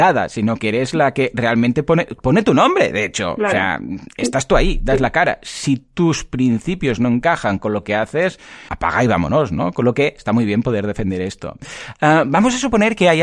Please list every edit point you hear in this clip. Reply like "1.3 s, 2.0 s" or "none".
8.7 s